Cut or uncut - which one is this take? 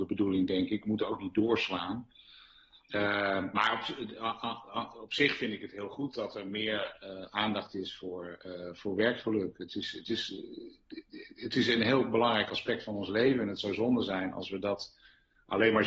uncut